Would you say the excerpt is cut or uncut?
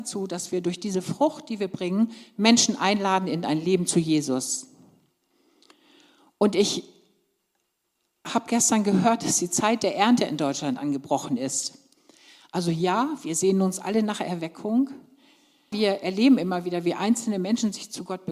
cut